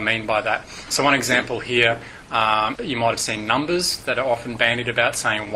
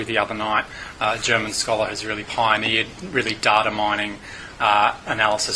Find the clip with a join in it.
first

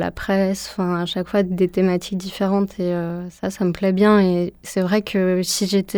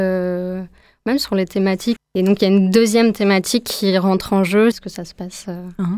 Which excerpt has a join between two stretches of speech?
second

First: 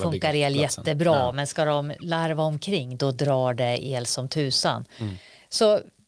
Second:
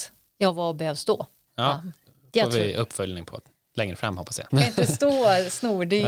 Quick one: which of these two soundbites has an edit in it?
second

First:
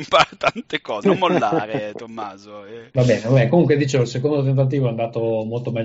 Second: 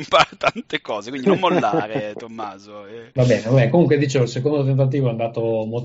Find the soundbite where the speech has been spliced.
first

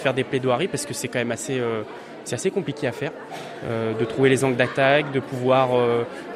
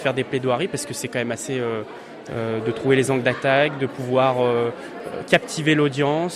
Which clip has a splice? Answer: second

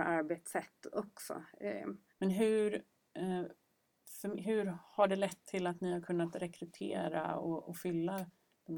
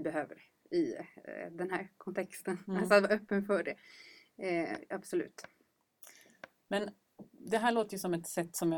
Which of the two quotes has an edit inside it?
first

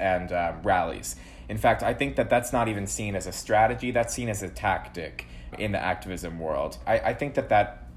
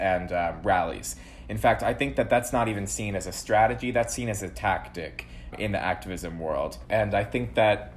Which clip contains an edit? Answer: second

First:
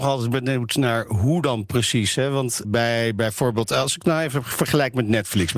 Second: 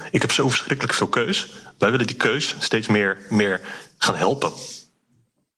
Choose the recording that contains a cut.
first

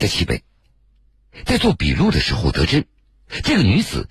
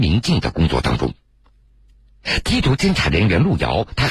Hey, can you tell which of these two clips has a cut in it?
second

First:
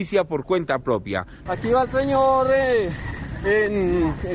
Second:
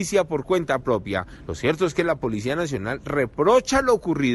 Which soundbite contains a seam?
first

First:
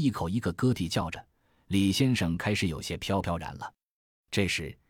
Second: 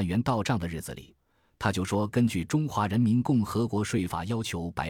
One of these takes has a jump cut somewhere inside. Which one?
second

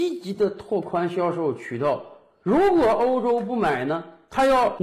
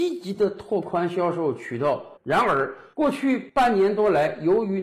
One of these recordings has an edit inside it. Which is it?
second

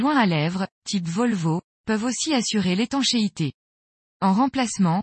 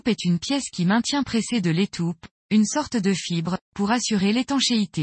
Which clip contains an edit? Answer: first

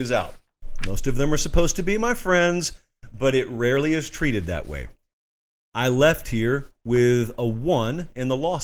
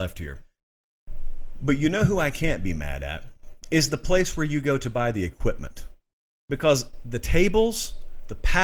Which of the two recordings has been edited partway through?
first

